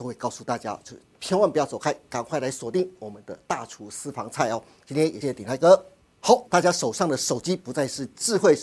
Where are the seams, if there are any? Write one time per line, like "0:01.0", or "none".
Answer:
0:05.2
0:06.4